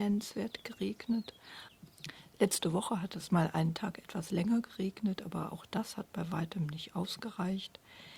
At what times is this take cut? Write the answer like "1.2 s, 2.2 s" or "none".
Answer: none